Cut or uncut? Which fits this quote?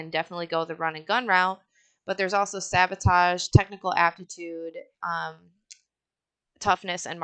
uncut